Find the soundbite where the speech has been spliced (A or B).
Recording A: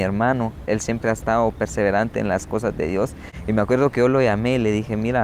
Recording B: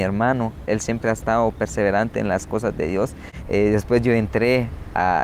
B